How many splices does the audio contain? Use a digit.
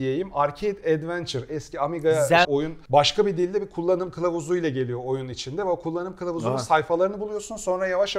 1